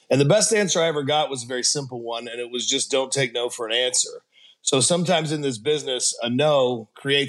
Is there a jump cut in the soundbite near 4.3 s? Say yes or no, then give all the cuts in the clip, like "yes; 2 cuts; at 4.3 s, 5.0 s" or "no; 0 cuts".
no; 0 cuts